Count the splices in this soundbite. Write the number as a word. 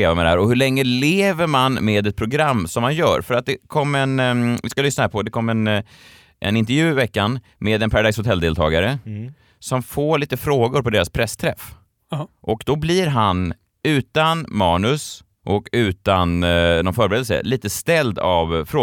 zero